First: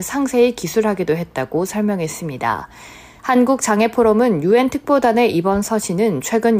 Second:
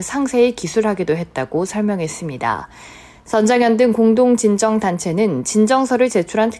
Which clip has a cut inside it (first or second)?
first